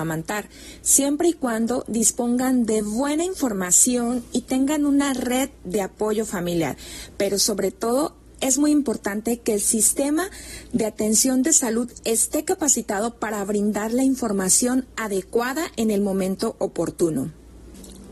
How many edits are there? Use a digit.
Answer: 0